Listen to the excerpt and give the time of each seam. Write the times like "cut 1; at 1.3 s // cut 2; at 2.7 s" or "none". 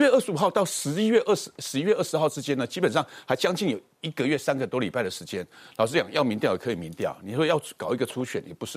none